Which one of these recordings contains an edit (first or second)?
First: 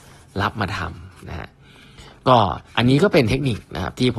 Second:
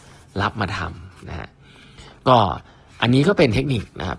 first